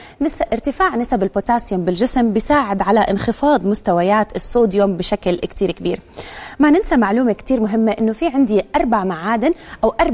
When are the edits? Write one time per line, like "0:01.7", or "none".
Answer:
none